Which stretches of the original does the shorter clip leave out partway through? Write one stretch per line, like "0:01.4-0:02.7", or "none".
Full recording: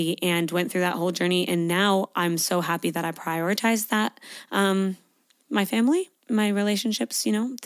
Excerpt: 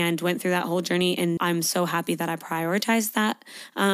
0:01.7-0:02.1